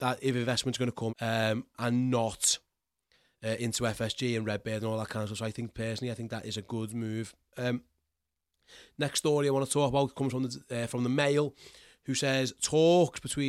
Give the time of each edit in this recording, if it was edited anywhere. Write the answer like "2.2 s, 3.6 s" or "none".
1.1 s